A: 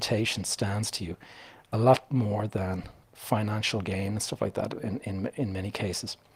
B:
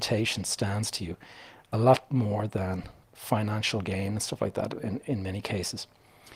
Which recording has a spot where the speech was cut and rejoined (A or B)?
B